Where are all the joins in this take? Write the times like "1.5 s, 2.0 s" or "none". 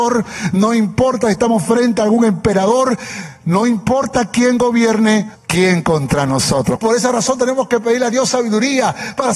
5.3 s, 6.8 s